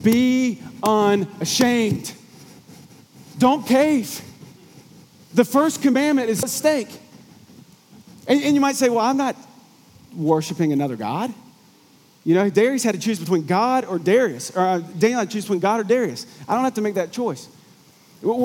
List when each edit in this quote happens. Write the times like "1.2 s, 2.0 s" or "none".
6.4 s